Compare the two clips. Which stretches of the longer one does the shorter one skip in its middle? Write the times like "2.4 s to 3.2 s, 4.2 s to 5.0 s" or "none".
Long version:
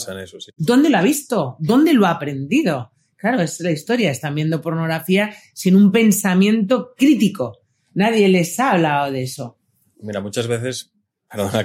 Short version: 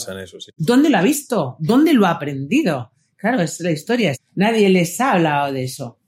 4.1 s to 7.7 s